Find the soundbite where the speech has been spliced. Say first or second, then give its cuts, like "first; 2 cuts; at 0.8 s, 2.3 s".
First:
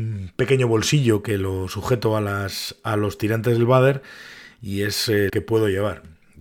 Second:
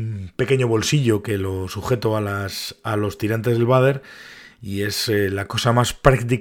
first; 1 cut; at 5.3 s